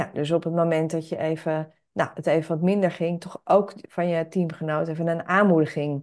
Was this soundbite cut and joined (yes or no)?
no